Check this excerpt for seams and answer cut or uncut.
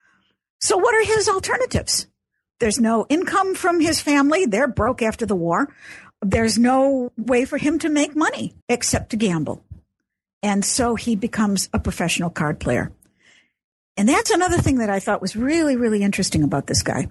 cut